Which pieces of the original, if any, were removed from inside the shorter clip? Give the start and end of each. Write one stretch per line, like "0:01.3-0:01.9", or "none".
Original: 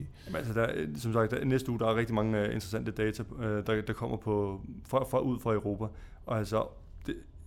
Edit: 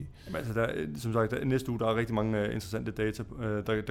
none